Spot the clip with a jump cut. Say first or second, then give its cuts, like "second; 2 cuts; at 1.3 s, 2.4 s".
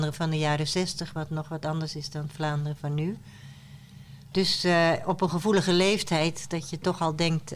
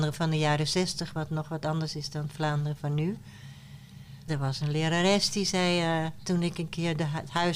second; 1 cut; at 4.3 s